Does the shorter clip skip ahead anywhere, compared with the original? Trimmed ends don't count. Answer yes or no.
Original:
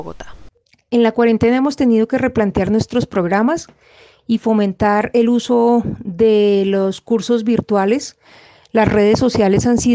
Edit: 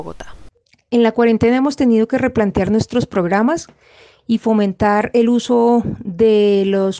no